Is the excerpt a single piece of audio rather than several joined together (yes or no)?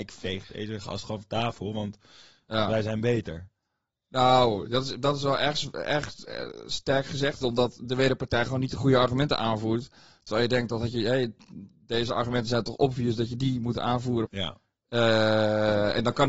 no